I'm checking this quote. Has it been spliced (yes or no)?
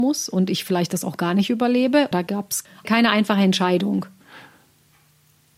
yes